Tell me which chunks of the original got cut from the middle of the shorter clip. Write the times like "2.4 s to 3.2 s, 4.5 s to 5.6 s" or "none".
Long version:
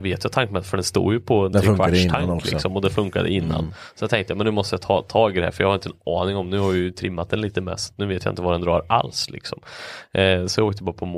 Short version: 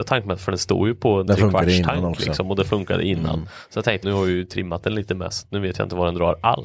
4.3 s to 6.5 s